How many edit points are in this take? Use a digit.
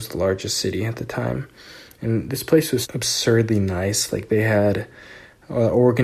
1